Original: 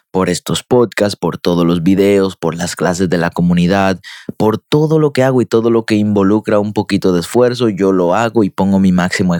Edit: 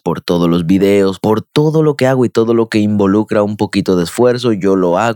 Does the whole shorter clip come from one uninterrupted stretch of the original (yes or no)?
no